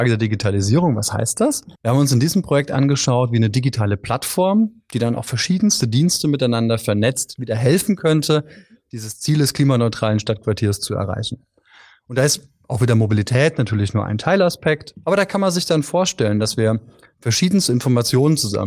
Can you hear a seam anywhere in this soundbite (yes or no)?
yes